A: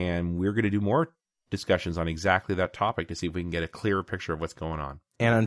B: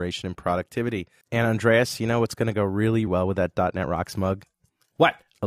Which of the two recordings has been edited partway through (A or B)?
B